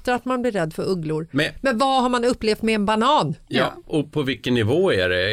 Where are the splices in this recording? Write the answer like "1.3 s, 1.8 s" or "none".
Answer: none